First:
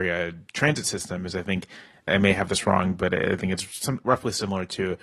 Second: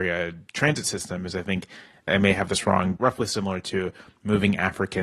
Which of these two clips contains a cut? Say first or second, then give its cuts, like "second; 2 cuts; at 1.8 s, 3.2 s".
second; 1 cut; at 3.0 s